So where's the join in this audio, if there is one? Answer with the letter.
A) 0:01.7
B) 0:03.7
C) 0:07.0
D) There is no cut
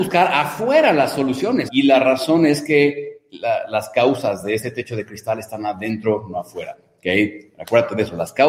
A